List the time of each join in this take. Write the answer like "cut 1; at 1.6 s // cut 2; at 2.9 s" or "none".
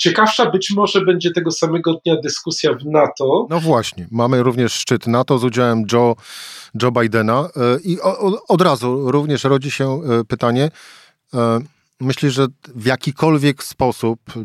none